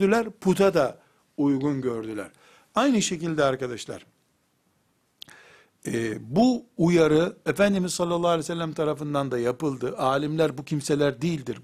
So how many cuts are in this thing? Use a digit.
0